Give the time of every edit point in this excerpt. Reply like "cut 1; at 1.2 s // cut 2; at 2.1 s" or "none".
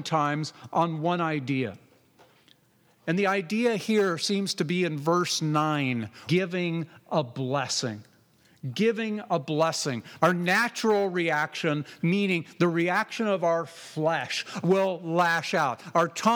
cut 1; at 6.3 s // cut 2; at 10.2 s // cut 3; at 14.6 s